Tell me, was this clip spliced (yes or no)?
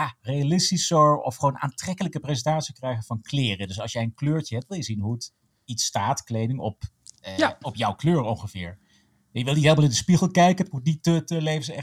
no